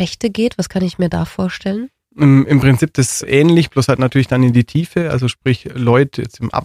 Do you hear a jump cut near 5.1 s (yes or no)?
no